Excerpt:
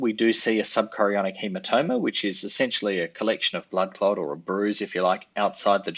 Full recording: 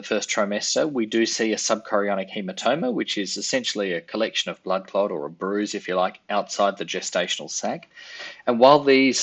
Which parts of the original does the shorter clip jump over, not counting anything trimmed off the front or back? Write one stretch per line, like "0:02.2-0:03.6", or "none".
none